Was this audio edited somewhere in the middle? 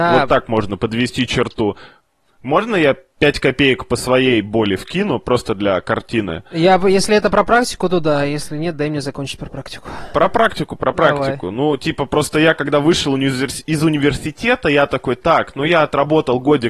no; 0 cuts

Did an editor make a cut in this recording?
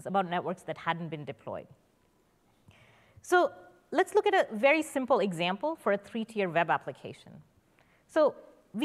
no; 0 cuts

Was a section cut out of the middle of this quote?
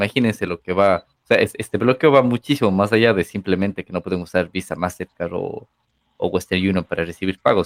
no; 0 cuts

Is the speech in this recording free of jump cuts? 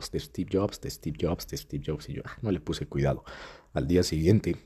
yes; 0 cuts

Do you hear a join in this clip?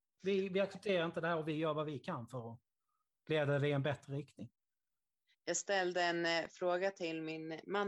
no; 0 cuts

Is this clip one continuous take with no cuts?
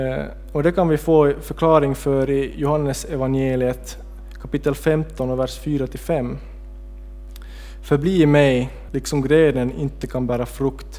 no; 1 cut; at 8.9 s

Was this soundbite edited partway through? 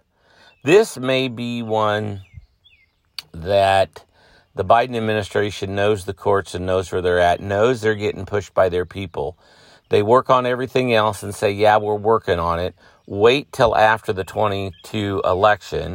no; 0 cuts

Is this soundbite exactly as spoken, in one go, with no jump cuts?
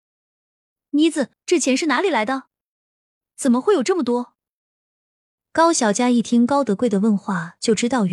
no; 1 cut; at 1.3 s

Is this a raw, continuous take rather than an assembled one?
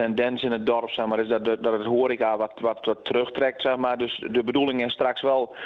no; 2 cuts; at 2.5 s, 4.3 s

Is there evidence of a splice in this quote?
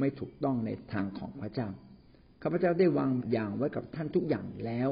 yes; 1 cut; at 3.2 s

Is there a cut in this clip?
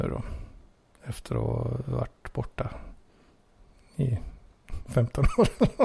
no; 0 cuts

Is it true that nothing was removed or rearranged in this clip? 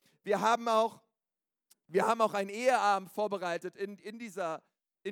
yes; 0 cuts

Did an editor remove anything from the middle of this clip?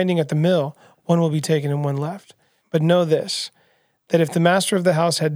yes; 1 cut; at 2.6 s

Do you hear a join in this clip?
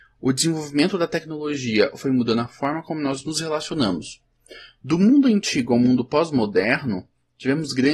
no; 0 cuts

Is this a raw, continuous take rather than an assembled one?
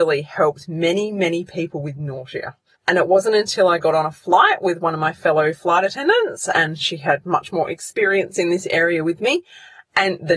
no; 1 cut; at 2.7 s

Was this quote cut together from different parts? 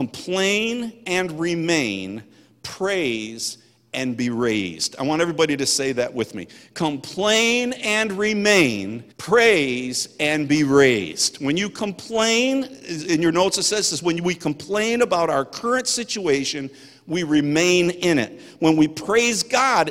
yes; 1 cut; at 9.1 s

